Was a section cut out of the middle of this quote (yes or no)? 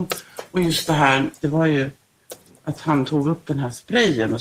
yes